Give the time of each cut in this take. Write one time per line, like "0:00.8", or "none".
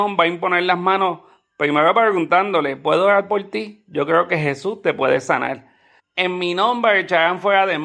0:06.0